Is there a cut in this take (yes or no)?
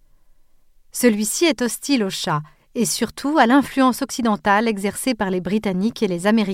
no